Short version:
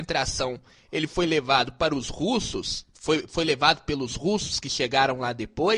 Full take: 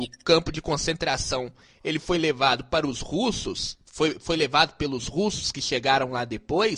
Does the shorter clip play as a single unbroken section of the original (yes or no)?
yes